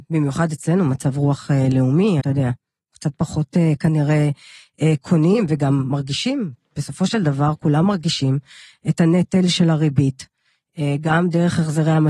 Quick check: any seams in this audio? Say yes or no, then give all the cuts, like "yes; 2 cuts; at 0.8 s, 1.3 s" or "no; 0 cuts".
yes; 1 cut; at 2.2 s